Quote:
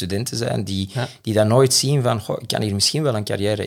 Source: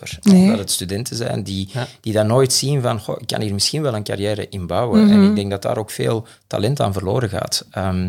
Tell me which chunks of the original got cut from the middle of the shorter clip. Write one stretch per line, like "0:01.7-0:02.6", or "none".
none